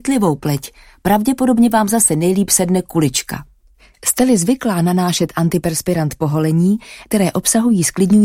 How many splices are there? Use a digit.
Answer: 1